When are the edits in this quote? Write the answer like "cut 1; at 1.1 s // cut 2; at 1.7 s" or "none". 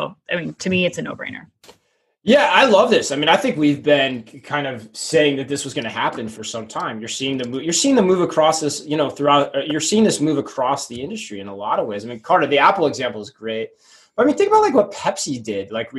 none